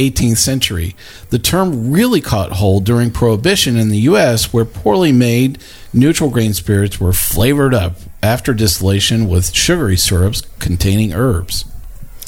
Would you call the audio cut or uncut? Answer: uncut